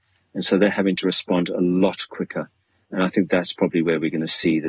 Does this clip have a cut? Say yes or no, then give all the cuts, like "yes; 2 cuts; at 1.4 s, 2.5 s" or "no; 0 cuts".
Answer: no; 0 cuts